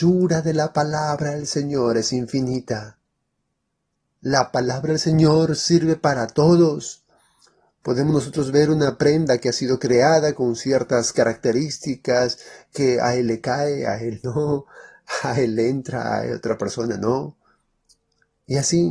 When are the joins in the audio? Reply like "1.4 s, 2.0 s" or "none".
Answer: none